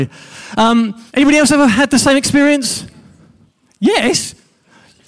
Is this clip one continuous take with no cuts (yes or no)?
no